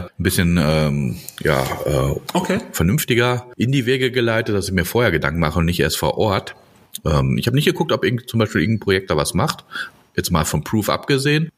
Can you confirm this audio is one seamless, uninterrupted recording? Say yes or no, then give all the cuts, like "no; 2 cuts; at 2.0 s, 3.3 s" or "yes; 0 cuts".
yes; 0 cuts